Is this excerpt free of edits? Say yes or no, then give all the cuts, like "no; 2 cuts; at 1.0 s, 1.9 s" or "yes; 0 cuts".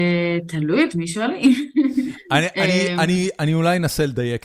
yes; 0 cuts